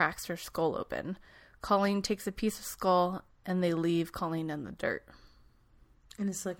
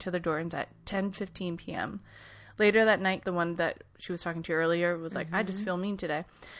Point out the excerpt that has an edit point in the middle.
second; 1 cut; at 3.2 s

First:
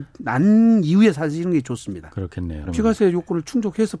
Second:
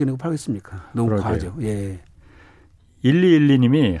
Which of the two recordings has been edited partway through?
first; 1 cut; at 2.7 s

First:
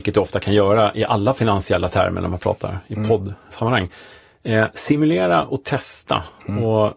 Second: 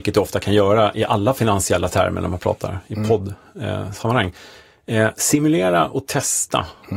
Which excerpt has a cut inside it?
first; 1 cut; at 3.5 s

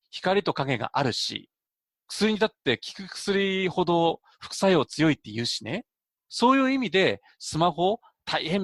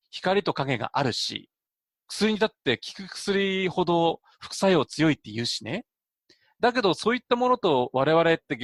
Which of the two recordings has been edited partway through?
first; 1 cut; at 6.2 s

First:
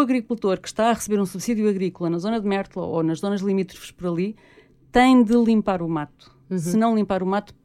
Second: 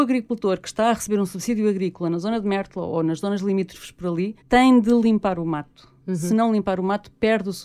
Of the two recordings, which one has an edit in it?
second; 1 cut; at 4.4 s

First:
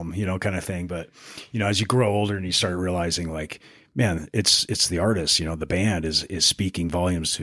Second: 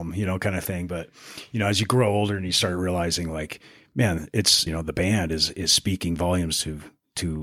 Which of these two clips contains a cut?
second; 1 cut; at 4.7 s

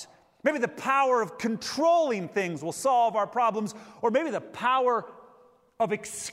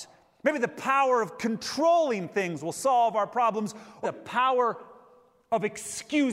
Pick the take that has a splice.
second; 1 cut; at 4.0 s

